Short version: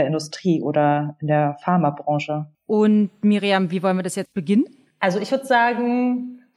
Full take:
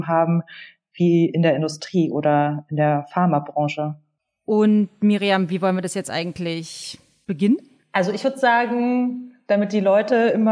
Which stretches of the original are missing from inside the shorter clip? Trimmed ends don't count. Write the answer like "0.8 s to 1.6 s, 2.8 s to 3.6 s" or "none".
4.0 s to 4.3 s, 6.0 s to 7.2 s